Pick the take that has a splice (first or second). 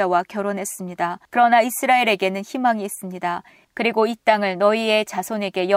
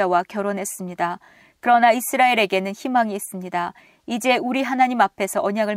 first